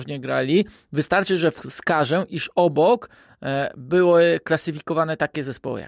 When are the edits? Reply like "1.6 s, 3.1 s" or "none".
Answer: none